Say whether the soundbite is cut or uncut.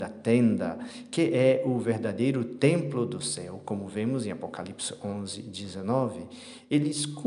uncut